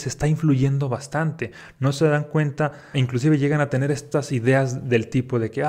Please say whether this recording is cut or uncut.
cut